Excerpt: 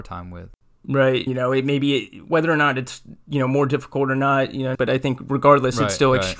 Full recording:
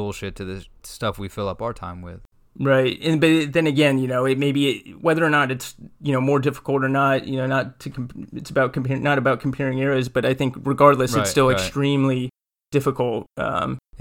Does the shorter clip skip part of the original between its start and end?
yes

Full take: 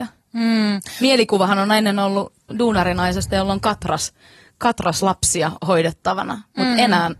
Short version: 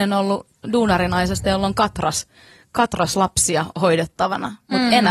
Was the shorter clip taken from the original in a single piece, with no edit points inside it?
yes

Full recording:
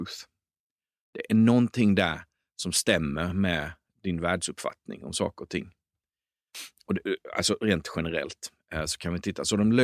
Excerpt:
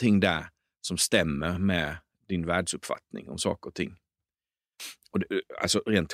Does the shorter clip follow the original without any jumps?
yes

